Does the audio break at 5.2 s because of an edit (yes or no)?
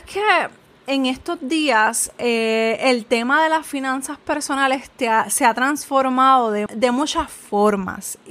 no